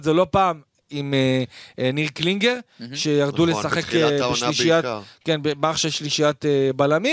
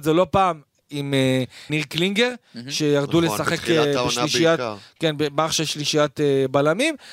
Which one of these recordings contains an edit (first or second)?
second